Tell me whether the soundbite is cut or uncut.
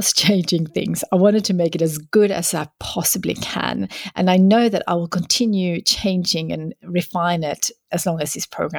uncut